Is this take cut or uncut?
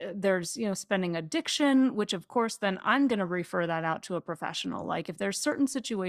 uncut